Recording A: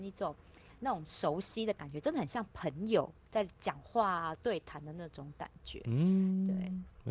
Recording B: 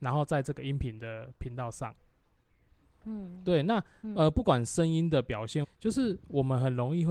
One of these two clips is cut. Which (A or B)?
B